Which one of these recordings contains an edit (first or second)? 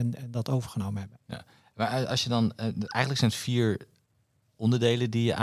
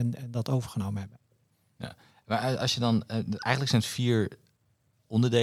first